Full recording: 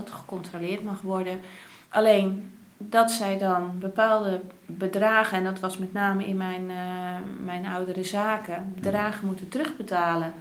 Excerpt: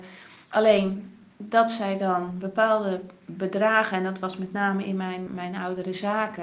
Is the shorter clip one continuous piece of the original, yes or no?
no